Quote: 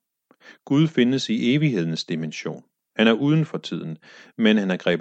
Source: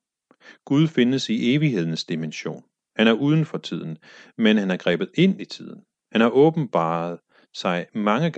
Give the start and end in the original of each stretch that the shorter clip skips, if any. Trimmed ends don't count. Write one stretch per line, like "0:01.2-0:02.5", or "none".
none